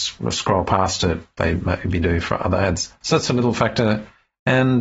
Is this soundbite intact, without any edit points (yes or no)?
no